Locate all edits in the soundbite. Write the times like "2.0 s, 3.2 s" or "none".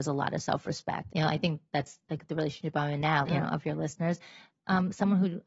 1.1 s, 3.3 s